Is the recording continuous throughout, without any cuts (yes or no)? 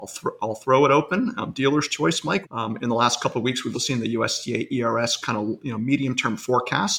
no